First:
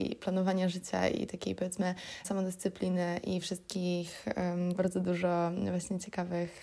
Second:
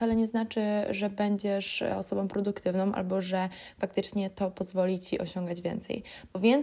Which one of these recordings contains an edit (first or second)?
first